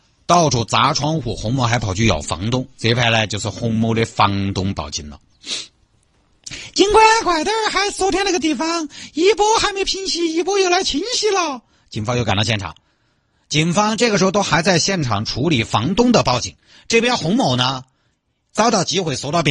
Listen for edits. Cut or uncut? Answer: uncut